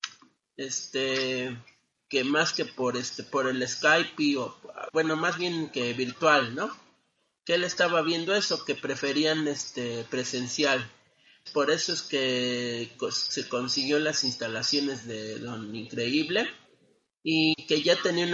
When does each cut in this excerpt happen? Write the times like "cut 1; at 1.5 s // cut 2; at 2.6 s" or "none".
cut 1; at 11.5 s